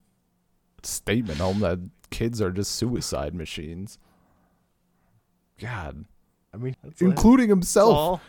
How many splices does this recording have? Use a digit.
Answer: 1